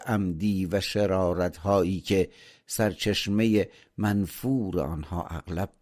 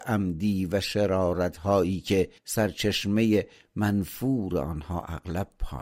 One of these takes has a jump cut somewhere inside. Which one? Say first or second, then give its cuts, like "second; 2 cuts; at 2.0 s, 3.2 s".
second; 1 cut; at 2.4 s